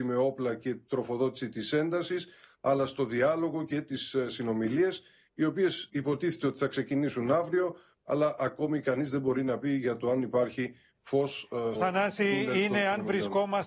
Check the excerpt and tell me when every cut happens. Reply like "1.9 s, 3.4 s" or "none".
11.7 s